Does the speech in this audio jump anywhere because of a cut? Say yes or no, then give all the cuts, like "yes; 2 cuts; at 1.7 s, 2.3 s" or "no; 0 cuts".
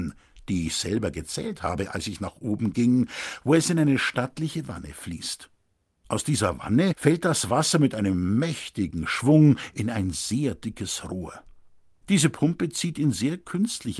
yes; 1 cut; at 12.0 s